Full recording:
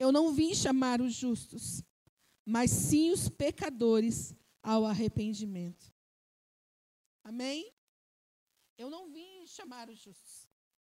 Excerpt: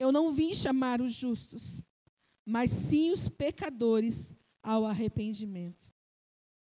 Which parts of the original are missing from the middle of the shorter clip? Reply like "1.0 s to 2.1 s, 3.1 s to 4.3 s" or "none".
none